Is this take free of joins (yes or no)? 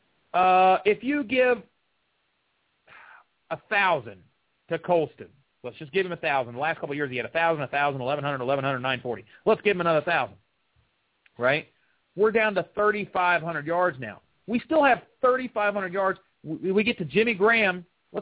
yes